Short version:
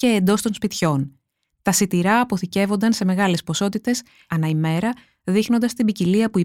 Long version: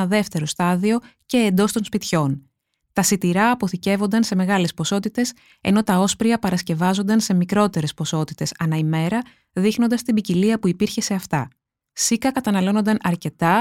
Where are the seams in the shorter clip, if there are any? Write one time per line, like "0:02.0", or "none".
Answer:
0:04.3